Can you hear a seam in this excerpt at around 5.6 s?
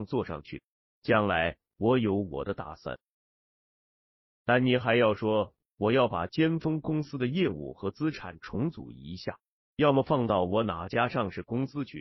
yes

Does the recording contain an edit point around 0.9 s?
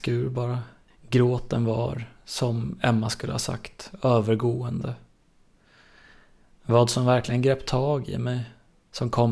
yes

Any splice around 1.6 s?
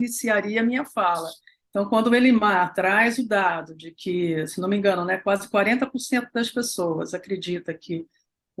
yes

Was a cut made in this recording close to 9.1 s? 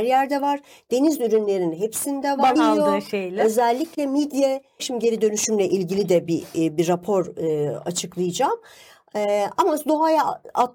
no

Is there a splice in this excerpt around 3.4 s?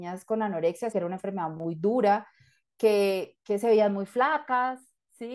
no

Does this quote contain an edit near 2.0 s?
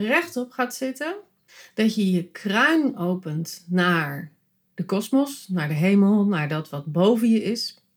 no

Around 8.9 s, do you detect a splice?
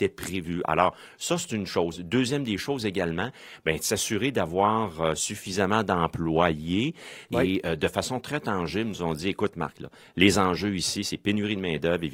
no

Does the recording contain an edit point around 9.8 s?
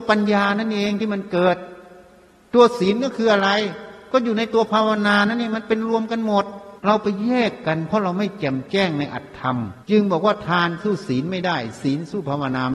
yes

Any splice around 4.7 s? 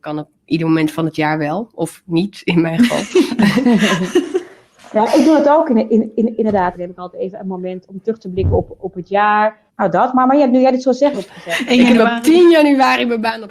no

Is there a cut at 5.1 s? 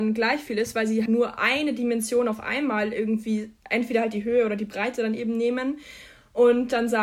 no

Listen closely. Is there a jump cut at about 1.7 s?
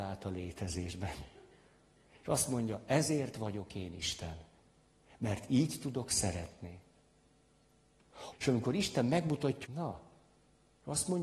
no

